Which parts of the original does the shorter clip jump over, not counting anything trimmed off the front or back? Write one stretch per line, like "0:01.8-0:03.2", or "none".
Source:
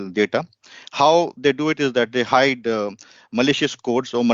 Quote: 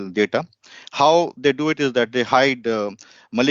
none